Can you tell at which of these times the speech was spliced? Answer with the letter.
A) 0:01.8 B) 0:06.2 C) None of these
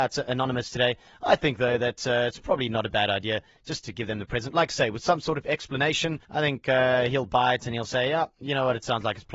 B